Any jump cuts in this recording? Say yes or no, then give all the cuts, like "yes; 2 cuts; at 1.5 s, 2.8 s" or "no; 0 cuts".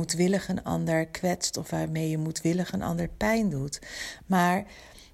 no; 0 cuts